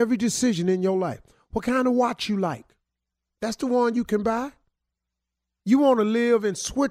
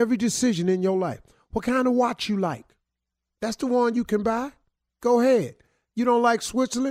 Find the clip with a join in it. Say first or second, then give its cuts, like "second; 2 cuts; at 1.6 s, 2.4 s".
second; 1 cut; at 4.9 s